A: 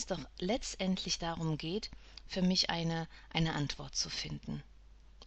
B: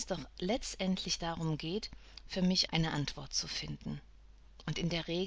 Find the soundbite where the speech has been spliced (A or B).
B